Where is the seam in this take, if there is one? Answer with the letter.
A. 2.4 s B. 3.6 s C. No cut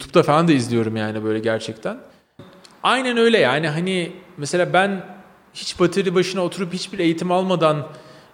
A